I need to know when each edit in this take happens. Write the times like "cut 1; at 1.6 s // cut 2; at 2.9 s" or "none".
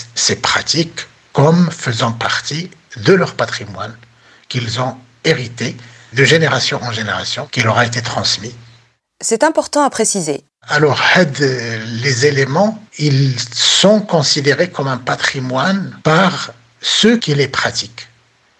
cut 1; at 10.5 s // cut 2; at 12.9 s // cut 3; at 16.0 s